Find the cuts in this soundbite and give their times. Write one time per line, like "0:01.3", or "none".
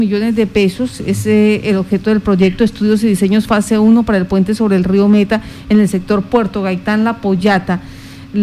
none